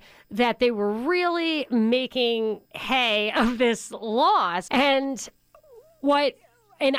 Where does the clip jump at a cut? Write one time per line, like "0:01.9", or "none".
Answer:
0:02.7
0:04.7